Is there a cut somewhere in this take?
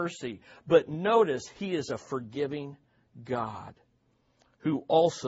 no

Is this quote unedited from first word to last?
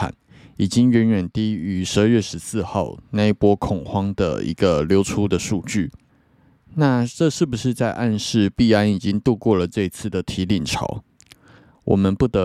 yes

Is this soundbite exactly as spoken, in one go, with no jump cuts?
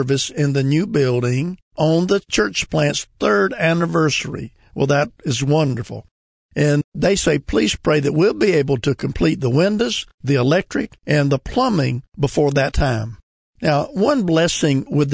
yes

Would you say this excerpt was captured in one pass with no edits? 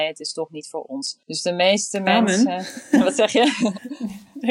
no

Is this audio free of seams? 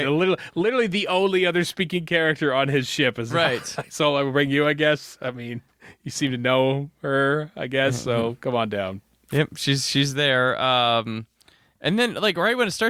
yes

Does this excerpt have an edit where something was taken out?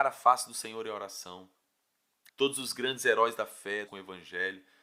yes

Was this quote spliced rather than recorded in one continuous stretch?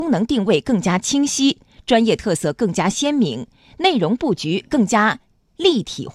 no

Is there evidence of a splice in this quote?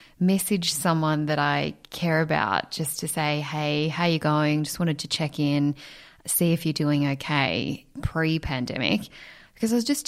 no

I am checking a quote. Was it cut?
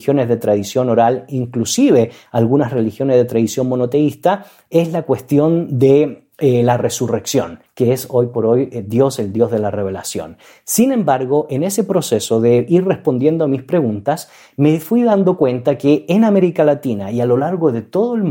yes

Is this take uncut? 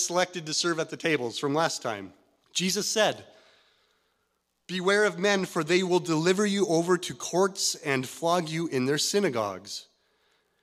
no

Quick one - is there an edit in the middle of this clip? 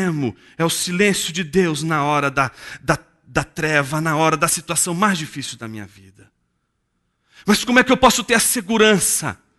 no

